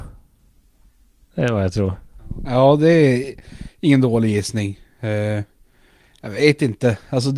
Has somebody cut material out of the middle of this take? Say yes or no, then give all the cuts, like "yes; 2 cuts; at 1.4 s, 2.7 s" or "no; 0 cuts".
no; 0 cuts